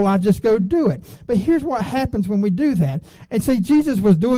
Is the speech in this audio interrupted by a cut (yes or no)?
yes